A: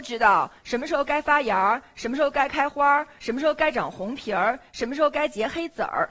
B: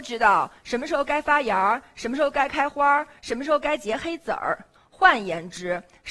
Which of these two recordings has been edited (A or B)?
B